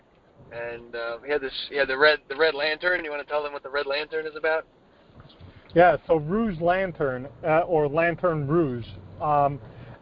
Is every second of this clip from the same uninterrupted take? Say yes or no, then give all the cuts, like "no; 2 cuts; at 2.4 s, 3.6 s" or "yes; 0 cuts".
yes; 0 cuts